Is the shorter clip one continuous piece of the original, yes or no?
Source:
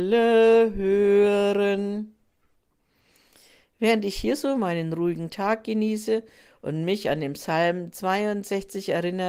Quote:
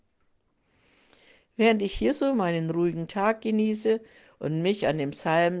yes